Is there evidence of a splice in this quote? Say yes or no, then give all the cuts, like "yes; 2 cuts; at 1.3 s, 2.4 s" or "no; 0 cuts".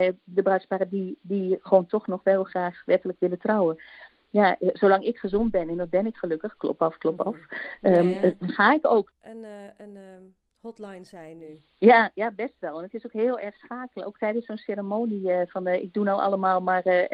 yes; 1 cut; at 9.1 s